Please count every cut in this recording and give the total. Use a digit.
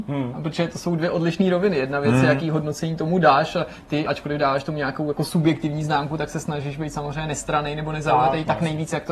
0